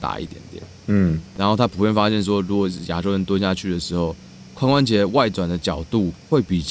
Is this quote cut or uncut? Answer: uncut